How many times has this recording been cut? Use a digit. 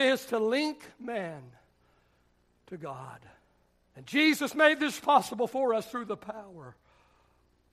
1